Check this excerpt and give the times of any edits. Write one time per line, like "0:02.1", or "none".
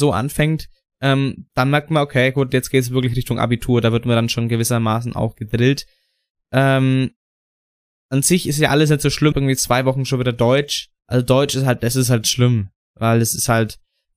0:09.3
0:11.0